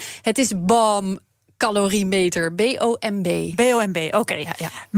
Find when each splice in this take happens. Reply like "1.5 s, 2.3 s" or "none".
none